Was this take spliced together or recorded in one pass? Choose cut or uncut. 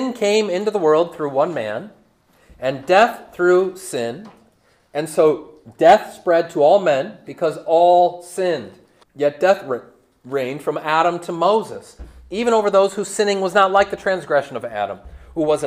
cut